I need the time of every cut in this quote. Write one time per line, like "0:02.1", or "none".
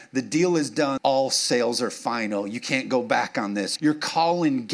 0:01.0
0:03.8

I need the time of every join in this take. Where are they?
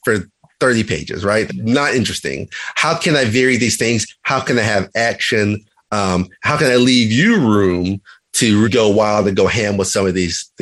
0:01.5
0:08.6

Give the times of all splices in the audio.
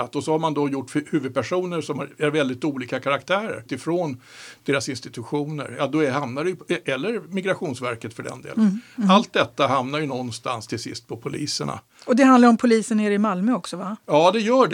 0:03.7

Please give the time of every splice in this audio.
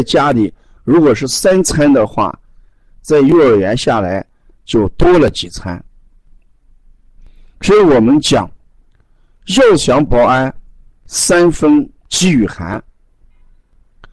0:10.1
0:12.0

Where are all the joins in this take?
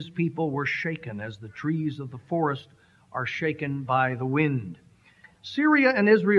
0:05.2

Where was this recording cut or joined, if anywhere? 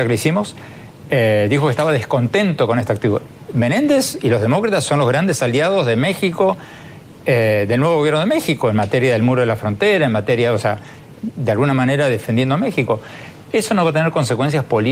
0:11.2

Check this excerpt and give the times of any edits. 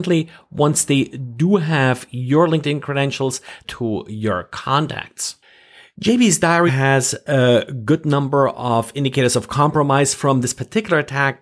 0:03.6
0:06.7

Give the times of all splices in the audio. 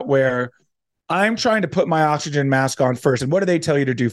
0:03.2

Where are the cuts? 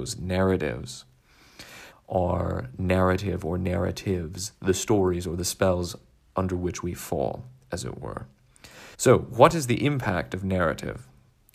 0:01.9
0:08.9

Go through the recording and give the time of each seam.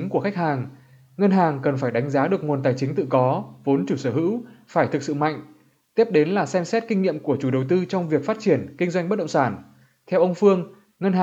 none

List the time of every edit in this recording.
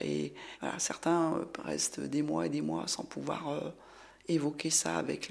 none

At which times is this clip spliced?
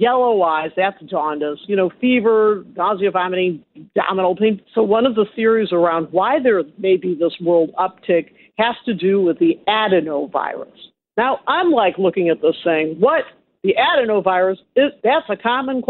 0:04.6

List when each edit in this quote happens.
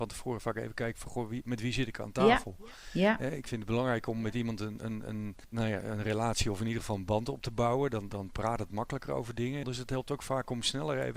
0:05.4
0:09.6

